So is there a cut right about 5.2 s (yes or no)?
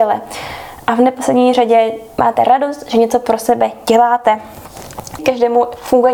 yes